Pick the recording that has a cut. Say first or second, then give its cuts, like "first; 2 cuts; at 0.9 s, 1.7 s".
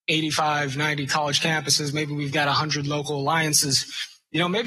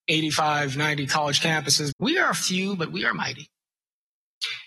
second; 1 cut; at 1.9 s